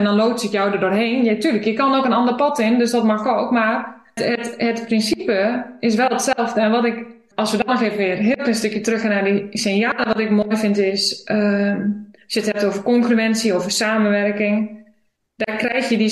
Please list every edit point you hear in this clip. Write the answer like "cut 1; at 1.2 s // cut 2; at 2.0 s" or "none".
cut 1; at 4.2 s // cut 2; at 7.3 s